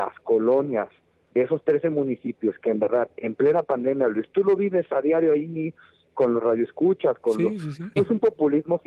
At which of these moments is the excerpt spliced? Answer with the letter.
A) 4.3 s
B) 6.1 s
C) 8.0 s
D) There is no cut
C